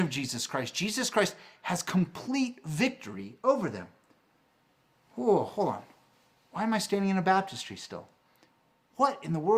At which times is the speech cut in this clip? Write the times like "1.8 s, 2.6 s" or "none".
none